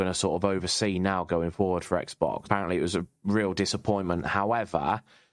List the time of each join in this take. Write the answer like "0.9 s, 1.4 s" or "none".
2.4 s